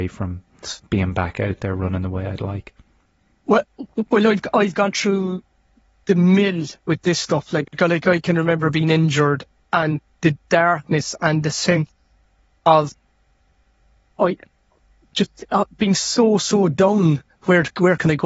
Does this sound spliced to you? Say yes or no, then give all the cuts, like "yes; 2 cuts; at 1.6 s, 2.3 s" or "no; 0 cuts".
no; 0 cuts